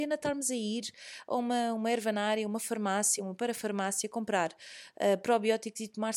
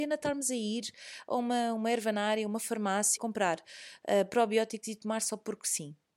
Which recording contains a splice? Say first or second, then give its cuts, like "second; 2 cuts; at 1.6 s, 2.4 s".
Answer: second; 1 cut; at 3.2 s